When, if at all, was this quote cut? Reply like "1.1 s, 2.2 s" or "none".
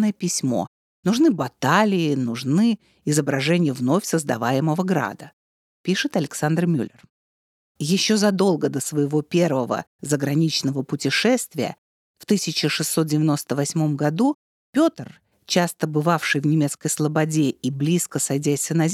none